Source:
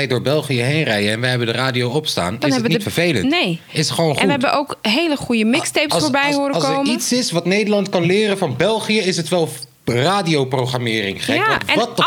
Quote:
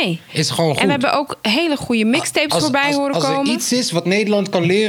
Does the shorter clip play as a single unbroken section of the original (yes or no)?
yes